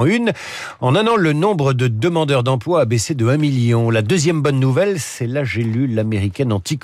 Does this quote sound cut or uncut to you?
uncut